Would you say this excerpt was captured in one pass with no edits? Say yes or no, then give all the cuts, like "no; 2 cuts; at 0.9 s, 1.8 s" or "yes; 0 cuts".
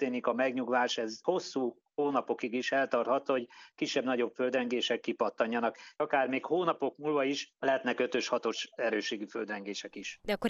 yes; 0 cuts